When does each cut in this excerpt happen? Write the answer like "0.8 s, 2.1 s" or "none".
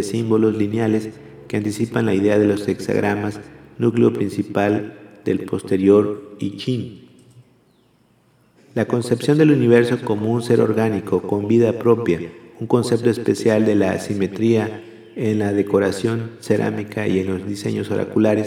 8.6 s